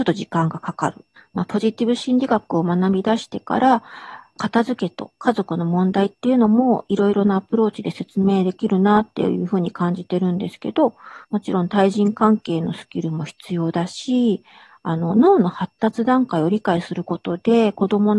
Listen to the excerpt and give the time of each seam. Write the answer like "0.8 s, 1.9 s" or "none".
1.2 s, 4.4 s, 11.2 s